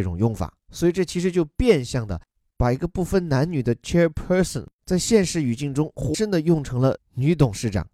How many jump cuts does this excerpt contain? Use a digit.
1